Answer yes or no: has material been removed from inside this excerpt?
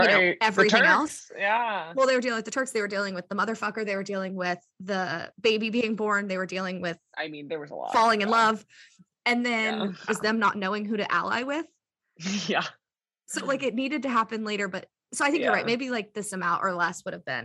yes